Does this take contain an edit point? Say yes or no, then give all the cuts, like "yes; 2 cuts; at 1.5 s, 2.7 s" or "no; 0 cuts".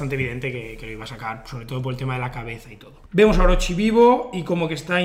yes; 1 cut; at 3.1 s